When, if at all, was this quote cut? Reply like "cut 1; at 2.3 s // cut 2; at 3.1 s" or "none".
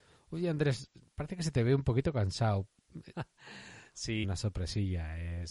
cut 1; at 3.1 s // cut 2; at 4.2 s